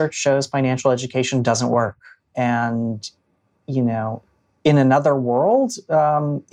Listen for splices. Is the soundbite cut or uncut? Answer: cut